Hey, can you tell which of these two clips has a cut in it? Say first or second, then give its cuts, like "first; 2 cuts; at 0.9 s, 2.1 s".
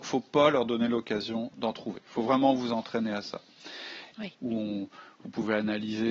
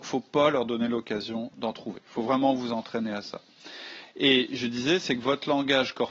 first; 1 cut; at 4.1 s